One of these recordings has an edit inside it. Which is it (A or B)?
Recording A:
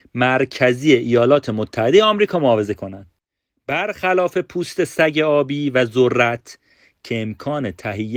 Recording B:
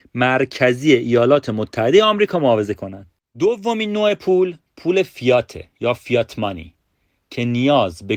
B